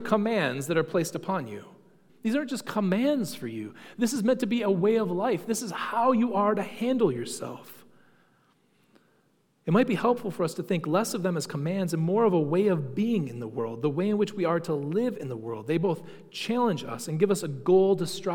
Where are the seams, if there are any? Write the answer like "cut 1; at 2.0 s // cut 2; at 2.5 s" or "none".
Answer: cut 1; at 2.1 s